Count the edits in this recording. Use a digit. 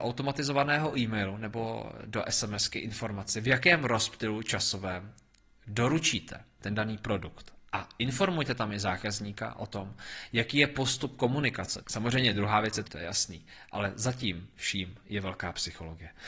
2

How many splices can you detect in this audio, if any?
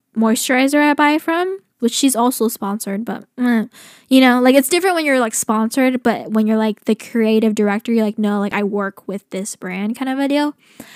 1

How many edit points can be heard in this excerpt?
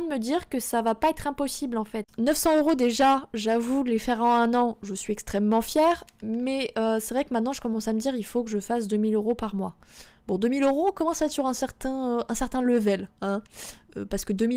0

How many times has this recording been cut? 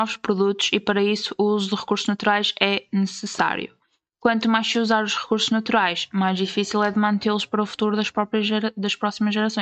0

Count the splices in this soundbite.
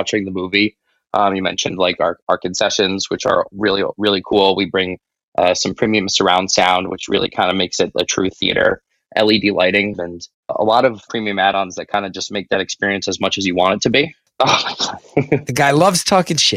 2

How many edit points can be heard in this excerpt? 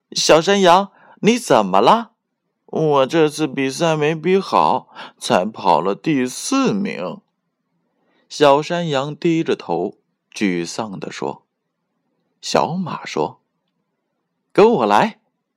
1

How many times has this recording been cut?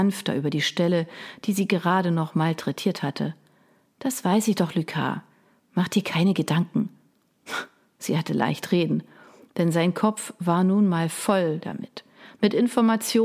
0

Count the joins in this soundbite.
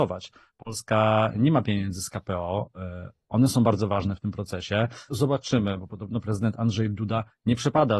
1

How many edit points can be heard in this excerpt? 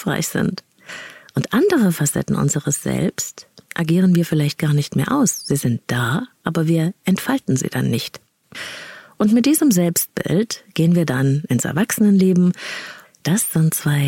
1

